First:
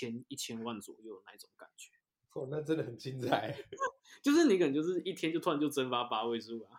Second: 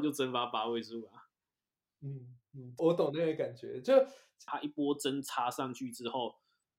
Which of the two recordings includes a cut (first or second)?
second